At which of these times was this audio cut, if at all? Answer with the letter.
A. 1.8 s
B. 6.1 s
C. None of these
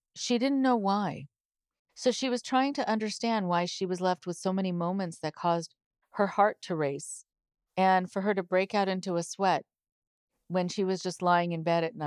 A